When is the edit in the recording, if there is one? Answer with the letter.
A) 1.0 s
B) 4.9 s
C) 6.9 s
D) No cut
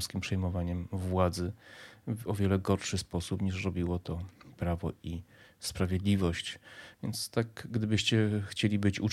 C